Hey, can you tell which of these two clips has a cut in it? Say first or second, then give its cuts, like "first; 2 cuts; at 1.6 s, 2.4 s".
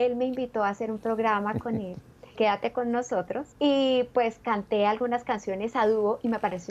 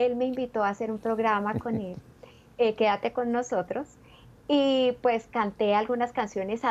first; 2 cuts; at 2.4 s, 3.5 s